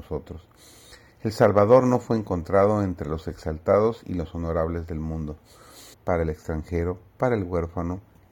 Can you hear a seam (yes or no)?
yes